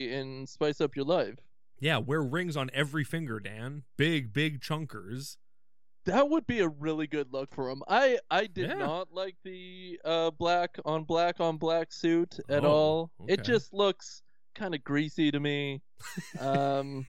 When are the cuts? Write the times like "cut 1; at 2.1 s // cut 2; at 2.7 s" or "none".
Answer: none